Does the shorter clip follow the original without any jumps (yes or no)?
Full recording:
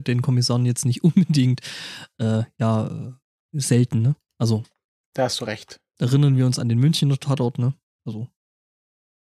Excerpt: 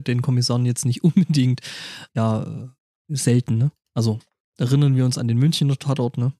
no